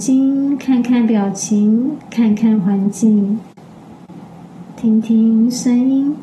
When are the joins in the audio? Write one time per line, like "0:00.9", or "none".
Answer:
0:04.8